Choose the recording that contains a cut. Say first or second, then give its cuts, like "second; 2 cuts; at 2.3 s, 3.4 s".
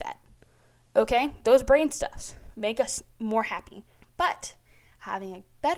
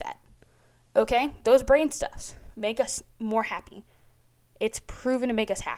first; 1 cut; at 4.0 s